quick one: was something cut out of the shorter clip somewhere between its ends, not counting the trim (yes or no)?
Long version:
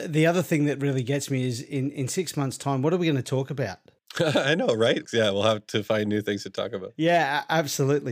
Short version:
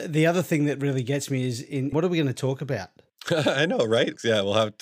yes